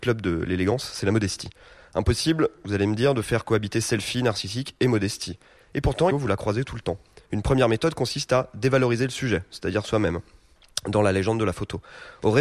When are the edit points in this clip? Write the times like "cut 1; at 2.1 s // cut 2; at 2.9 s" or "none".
cut 1; at 6.1 s